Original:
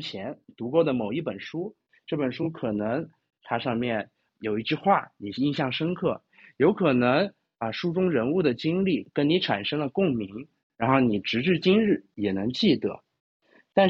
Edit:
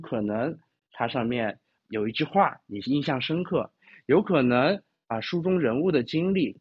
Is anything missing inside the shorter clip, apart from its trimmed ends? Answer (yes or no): no